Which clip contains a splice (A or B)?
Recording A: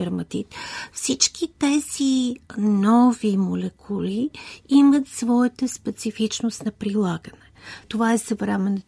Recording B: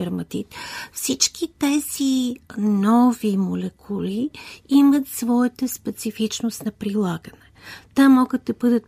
A